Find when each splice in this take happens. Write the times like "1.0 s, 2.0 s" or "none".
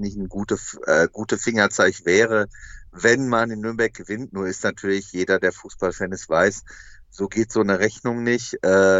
none